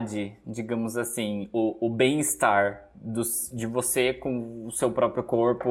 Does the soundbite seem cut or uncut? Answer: uncut